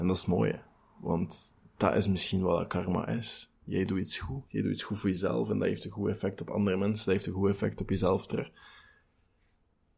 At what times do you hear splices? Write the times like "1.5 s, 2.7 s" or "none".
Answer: none